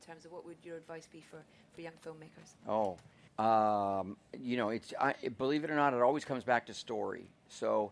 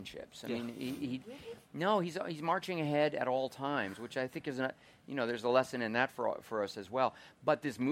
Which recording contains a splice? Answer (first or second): first